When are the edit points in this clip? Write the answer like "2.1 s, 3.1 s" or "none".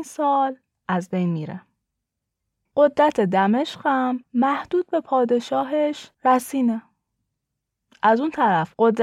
2.7 s, 6.1 s